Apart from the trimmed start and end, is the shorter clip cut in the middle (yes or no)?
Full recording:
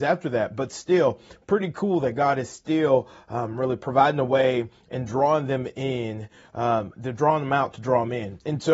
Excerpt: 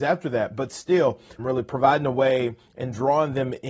yes